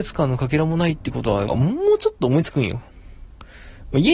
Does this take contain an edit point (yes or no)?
yes